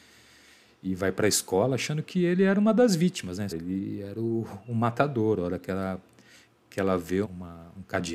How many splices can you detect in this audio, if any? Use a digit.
2